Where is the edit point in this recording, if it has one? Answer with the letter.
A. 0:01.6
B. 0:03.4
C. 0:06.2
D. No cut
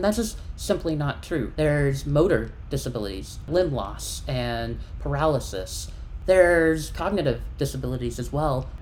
A